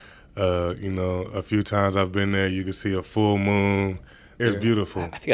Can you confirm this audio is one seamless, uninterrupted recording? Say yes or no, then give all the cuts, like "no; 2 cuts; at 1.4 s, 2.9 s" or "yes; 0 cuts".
no; 1 cut; at 4.4 s